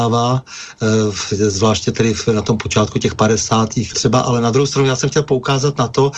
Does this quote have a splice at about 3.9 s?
yes; 1 cut; at 3.9 s

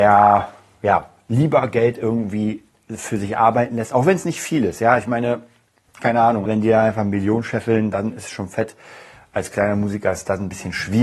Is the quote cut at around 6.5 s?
yes; 1 cut; at 6.5 s

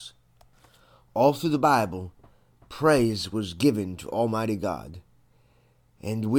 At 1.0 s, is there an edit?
no; 0 cuts

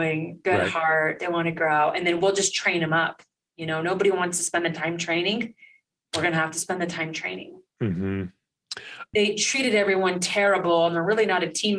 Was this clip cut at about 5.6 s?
no; 1 cut; at 9.1 s

